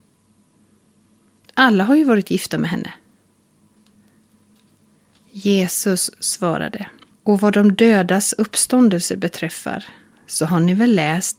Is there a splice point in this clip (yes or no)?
yes